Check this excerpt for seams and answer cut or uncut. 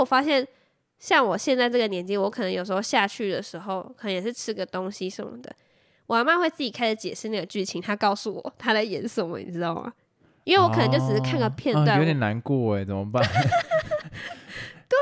uncut